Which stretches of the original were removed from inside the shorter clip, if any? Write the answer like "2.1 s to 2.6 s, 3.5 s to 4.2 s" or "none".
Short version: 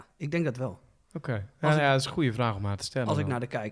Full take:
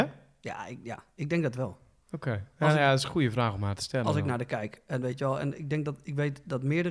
none

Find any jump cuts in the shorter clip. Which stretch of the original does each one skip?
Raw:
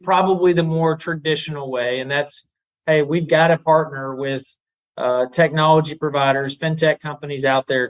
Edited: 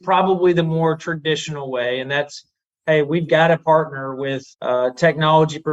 4.5 s to 4.9 s

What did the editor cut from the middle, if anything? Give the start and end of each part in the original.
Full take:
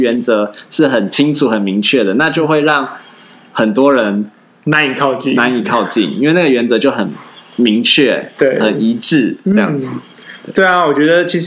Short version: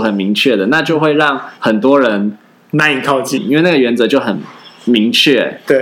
3.0 s to 3.5 s, 5.3 s to 6.1 s

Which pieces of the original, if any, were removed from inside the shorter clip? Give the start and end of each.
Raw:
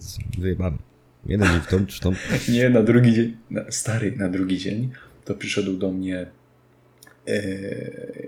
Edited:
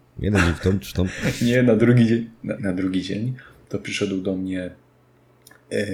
3.6 s to 4.1 s

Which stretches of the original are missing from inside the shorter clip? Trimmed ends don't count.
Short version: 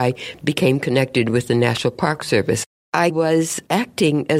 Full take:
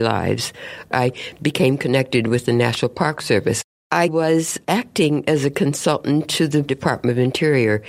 none

